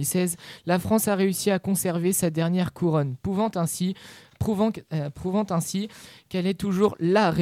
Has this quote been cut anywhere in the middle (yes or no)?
no